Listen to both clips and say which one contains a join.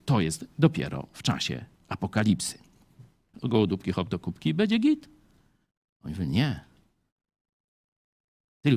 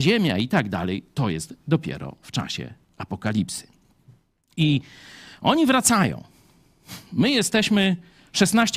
first; 1 cut; at 3.3 s

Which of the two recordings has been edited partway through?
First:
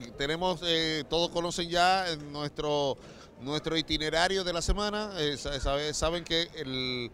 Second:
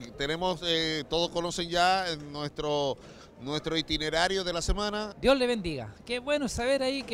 second; 1 cut; at 5.1 s

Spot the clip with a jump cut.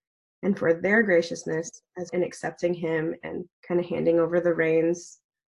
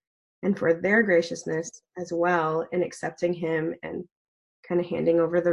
first; 2 cuts; at 2.1 s, 3.5 s

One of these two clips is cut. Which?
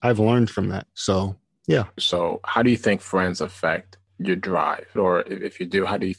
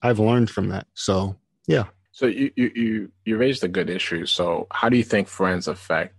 first; 2 cuts; at 2.0 s, 5.0 s

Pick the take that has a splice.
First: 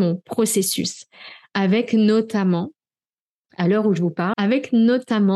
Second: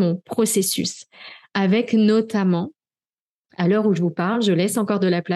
first; 1 cut; at 4.3 s

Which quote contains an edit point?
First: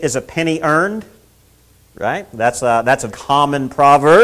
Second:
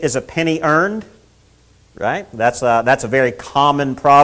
first; 1 cut; at 3.1 s

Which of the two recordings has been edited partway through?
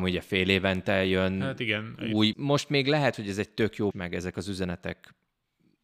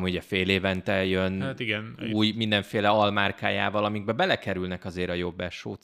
first; 2 cuts; at 2.3 s, 3.9 s

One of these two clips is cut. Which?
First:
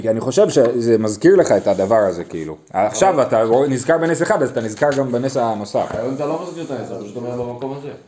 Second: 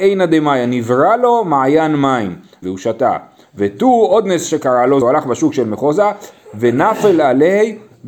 second; 2 cuts; at 2.6 s, 5.0 s

